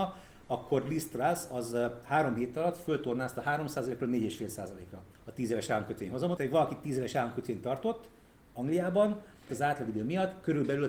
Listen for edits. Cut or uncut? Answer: cut